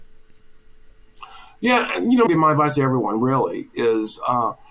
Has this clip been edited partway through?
yes; 1 cut; at 2.3 s

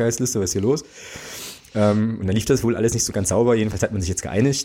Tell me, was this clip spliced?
no; 0 cuts

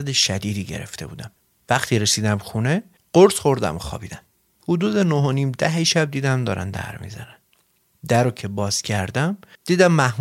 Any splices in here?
no; 0 cuts

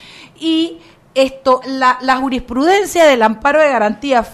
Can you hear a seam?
yes; 1 cut; at 1.6 s

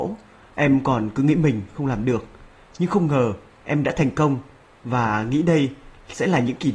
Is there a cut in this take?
no; 0 cuts

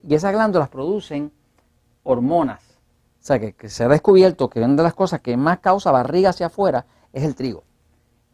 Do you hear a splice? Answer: yes; 1 cut; at 3.0 s

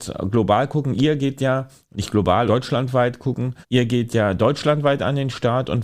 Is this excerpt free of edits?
no; 2 cuts; at 2.5 s, 3.6 s

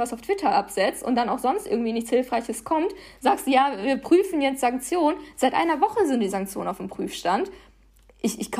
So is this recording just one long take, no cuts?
yes; 0 cuts

